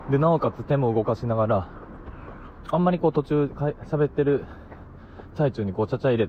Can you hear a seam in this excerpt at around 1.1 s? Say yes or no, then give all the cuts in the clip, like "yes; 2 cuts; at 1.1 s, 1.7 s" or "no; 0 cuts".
no; 1 cut; at 2.6 s